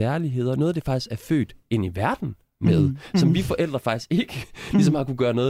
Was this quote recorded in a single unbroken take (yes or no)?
yes